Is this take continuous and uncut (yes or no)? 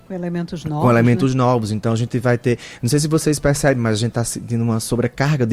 yes